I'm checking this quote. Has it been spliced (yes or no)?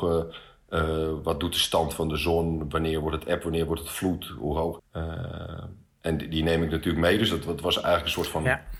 yes